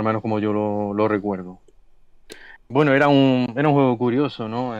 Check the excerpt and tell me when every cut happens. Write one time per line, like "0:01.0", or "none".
0:02.6